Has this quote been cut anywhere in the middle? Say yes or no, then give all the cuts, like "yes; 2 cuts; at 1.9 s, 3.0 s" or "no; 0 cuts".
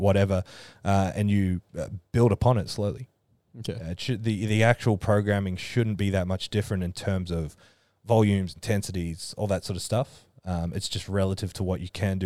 no; 0 cuts